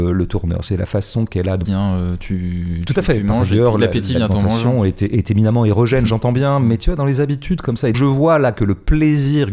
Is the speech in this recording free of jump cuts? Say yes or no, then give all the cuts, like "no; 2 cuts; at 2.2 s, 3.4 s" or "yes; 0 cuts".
no; 2 cuts; at 1.7 s, 7.9 s